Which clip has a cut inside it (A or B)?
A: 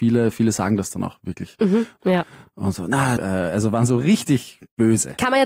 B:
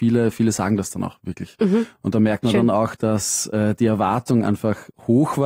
A